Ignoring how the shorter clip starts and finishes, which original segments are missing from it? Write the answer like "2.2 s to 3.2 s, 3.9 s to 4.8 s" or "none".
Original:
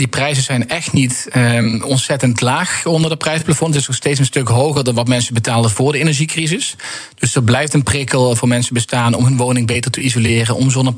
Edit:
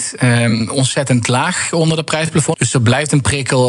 3.7 s to 7.2 s